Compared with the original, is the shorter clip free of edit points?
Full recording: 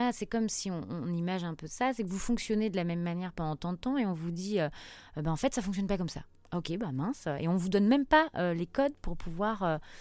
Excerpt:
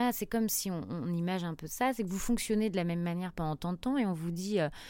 yes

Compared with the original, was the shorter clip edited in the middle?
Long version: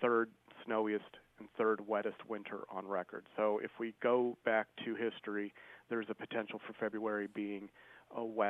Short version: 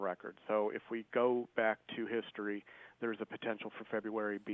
no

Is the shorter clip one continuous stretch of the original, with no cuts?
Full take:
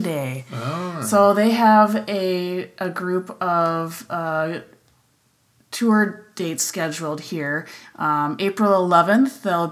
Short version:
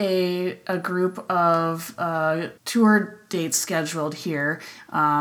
no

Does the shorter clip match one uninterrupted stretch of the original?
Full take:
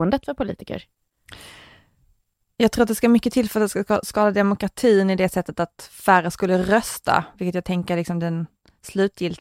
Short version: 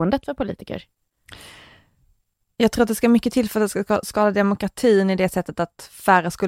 yes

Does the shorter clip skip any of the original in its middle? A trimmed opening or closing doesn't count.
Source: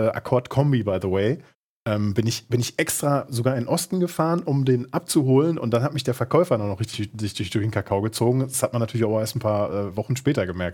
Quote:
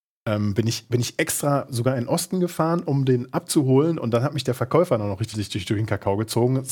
yes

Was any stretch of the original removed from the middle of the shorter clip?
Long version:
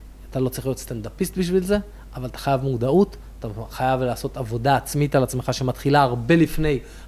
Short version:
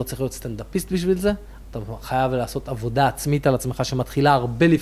yes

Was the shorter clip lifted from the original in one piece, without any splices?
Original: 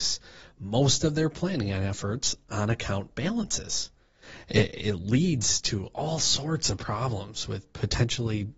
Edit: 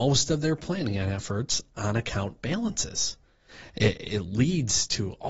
yes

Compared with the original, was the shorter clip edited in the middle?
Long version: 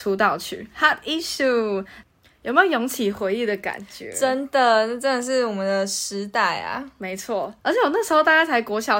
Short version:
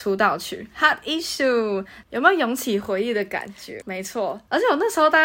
yes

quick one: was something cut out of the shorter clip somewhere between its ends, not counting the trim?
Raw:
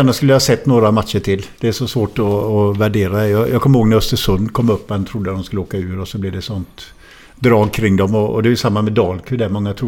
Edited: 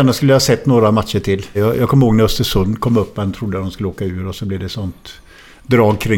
yes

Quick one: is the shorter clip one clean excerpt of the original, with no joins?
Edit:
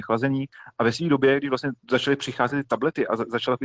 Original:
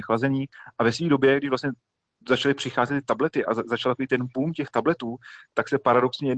no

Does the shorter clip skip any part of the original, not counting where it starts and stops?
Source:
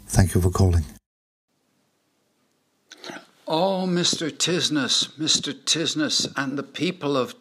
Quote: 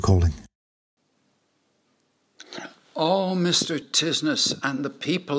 yes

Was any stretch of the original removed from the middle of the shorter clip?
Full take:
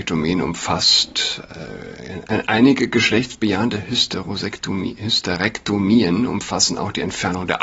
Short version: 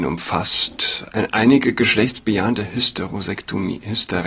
yes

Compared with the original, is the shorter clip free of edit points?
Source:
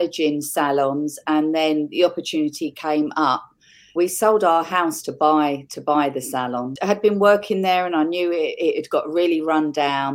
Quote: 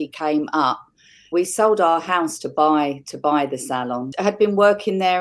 yes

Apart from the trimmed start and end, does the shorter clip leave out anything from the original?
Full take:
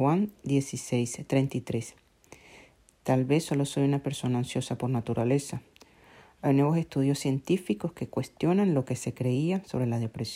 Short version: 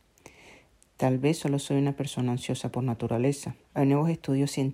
yes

